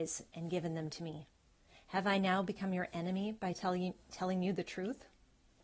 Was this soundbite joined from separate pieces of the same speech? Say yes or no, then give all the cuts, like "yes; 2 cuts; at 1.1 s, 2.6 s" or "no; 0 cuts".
no; 0 cuts